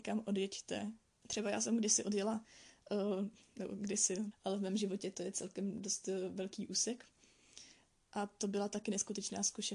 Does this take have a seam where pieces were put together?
yes; 3 cuts; at 1.2 s, 4.3 s, 8.0 s

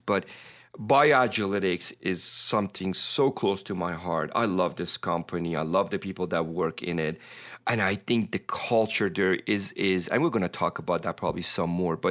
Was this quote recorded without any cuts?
yes; 0 cuts

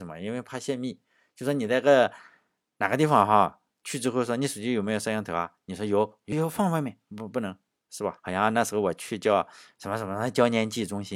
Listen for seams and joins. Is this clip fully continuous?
no; 2 cuts; at 6.3 s, 8.2 s

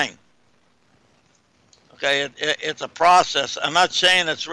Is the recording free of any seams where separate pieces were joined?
yes; 0 cuts

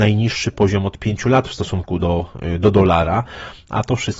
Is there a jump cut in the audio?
no; 0 cuts

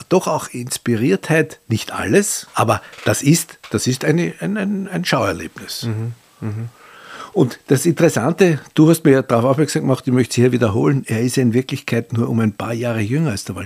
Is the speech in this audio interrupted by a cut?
no; 0 cuts

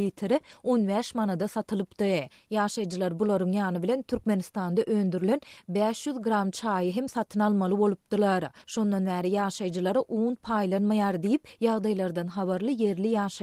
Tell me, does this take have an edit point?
yes; 1 cut; at 8.6 s

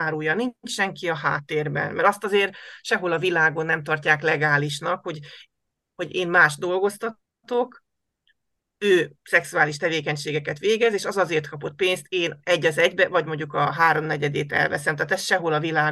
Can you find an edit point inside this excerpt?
no; 0 cuts

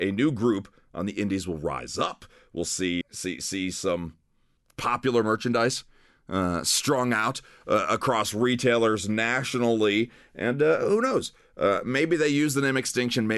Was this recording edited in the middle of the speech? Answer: yes; 1 cut; at 3.0 s

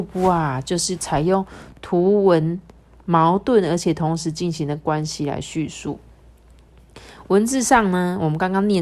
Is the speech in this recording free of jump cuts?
yes; 0 cuts

